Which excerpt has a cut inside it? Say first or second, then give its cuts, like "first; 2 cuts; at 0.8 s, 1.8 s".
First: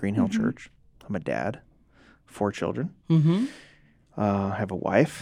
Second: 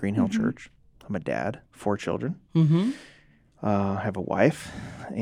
second; 1 cut; at 1.7 s